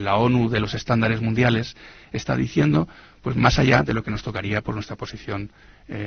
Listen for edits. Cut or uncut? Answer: uncut